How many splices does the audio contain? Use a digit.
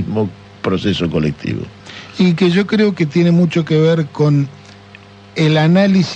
0